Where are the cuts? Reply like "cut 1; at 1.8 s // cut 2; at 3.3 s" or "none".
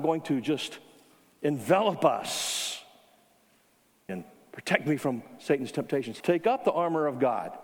cut 1; at 4.1 s // cut 2; at 6.2 s